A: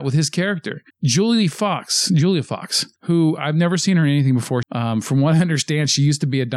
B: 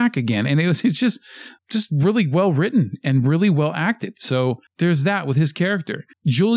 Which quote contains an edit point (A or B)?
A